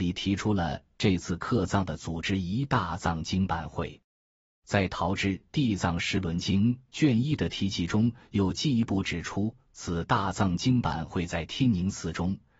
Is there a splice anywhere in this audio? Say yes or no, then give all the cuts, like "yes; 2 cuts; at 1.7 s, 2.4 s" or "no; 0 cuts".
no; 0 cuts